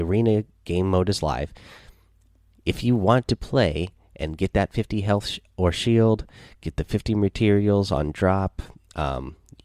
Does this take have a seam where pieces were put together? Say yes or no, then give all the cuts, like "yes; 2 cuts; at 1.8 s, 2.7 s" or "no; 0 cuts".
no; 0 cuts